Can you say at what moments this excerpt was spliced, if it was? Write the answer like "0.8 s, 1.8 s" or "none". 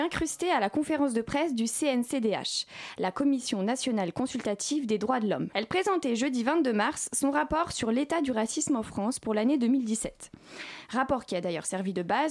5.5 s